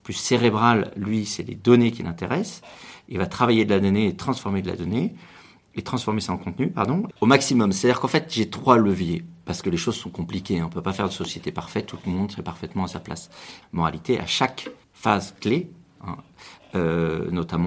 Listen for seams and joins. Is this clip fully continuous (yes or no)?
no